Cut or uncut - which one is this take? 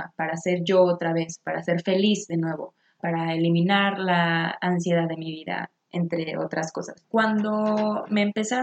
cut